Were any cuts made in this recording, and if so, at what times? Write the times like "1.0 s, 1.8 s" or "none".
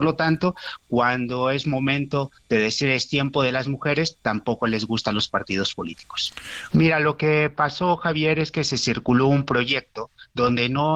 6.7 s